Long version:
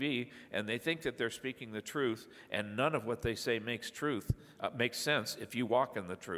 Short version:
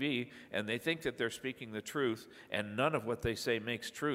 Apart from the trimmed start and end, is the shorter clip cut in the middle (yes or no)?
no